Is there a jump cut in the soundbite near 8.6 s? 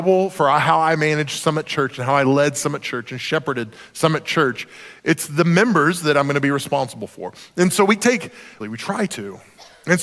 yes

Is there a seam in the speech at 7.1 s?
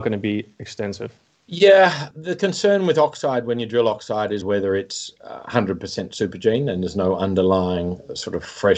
no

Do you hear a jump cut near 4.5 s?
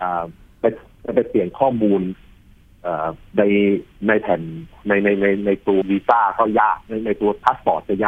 no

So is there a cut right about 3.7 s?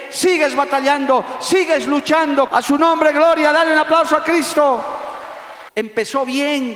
no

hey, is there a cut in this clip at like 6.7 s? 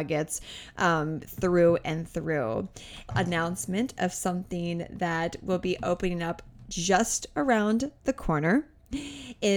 no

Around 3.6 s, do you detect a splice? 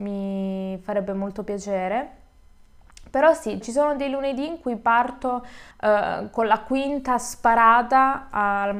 yes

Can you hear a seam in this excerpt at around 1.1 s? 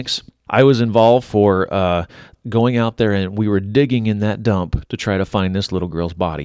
no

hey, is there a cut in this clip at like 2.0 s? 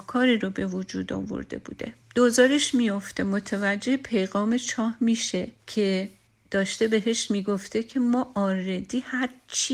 yes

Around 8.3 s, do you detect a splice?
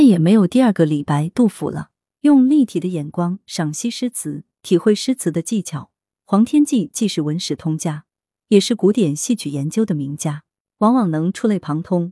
no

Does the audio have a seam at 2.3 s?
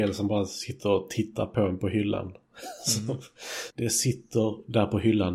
no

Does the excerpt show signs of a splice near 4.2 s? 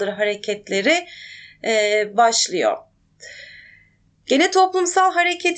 yes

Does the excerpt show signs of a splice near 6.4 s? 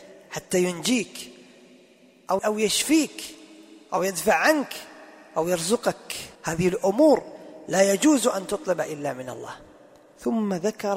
yes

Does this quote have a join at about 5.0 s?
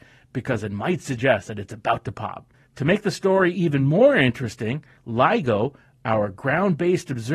yes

